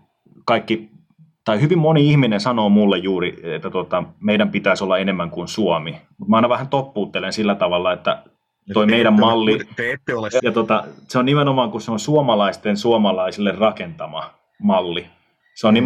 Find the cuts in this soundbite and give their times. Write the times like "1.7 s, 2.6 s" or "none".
10.4 s